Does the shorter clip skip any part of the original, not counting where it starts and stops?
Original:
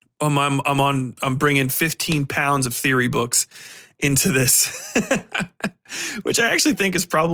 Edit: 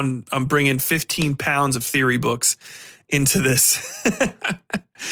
no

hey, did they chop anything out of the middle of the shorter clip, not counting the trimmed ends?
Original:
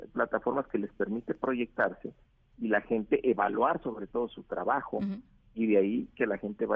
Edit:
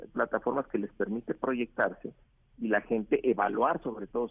no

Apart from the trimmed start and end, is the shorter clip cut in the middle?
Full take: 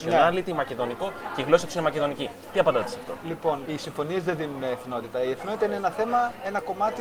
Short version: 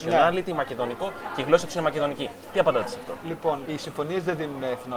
no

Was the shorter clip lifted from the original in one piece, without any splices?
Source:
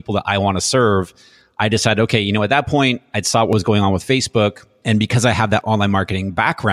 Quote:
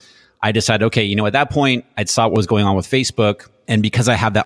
yes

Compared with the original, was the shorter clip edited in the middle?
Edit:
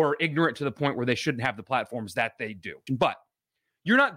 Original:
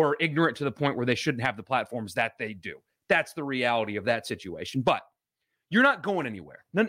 yes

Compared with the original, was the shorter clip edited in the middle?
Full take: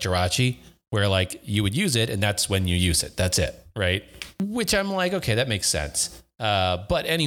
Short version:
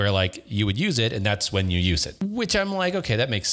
yes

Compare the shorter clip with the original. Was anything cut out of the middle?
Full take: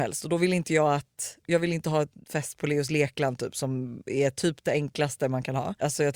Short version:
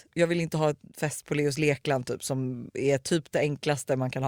no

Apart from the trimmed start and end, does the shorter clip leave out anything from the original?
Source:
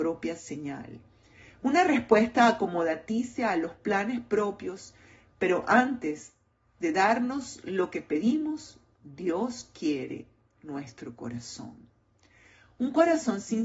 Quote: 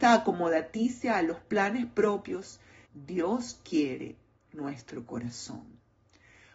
yes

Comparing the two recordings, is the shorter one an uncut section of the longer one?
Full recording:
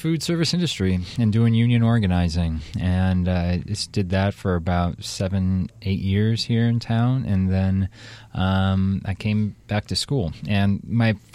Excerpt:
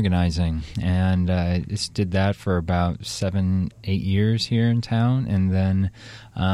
yes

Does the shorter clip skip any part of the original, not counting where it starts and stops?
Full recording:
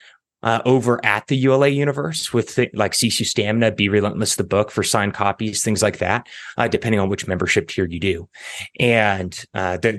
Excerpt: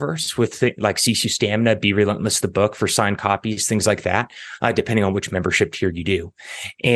no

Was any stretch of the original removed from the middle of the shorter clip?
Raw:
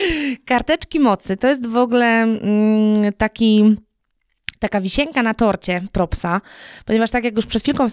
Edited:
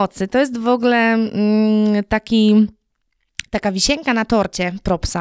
no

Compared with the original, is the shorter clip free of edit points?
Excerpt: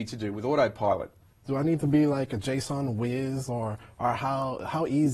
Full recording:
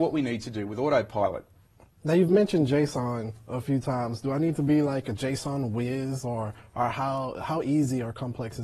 no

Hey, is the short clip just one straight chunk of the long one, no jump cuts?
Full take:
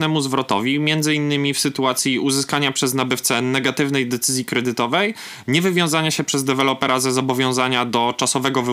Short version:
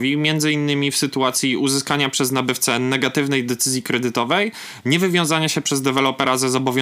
yes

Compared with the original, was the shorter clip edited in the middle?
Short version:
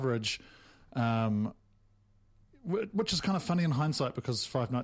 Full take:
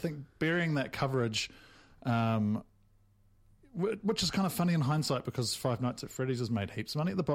no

